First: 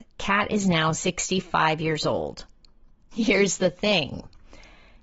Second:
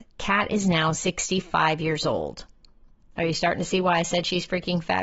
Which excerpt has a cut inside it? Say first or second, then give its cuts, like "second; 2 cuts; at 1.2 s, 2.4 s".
first; 1 cut; at 3.1 s